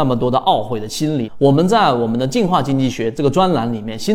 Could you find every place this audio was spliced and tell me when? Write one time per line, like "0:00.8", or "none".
0:01.3